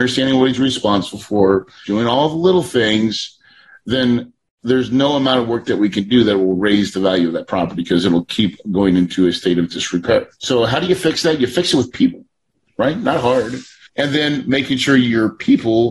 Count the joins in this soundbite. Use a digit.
1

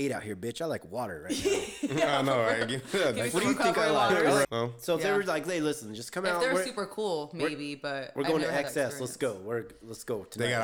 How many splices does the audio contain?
1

